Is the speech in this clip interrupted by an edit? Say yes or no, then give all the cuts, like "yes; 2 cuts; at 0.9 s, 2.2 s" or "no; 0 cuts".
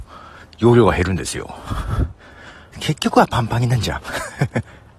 yes; 1 cut; at 2.7 s